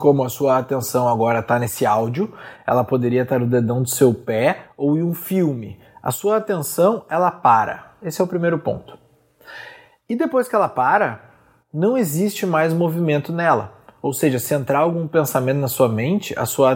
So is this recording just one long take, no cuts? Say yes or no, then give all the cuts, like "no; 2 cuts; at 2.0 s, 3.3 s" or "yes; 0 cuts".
yes; 0 cuts